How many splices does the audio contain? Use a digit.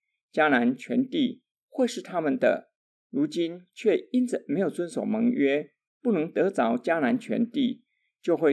0